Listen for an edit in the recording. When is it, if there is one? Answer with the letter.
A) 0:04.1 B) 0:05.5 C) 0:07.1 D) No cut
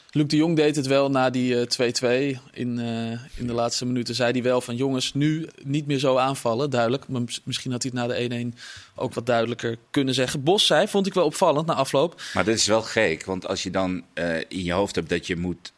B